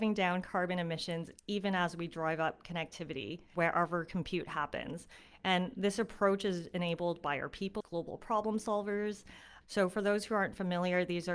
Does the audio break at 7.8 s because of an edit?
yes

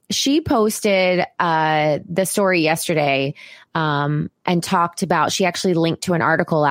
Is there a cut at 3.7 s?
no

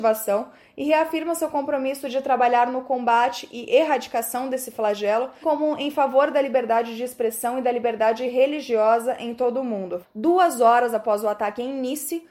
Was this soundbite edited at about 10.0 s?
yes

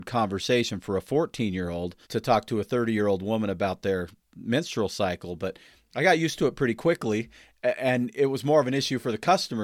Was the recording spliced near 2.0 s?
yes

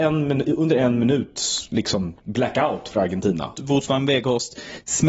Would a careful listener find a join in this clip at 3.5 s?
yes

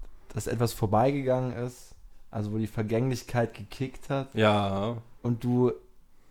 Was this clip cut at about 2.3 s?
no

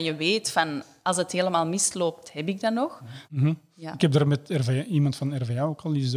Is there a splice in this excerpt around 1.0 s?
no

